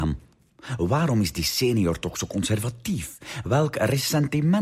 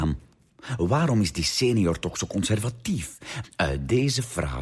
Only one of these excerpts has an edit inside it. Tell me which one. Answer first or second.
second